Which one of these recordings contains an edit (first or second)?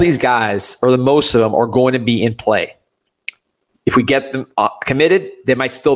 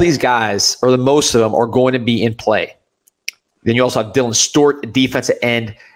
second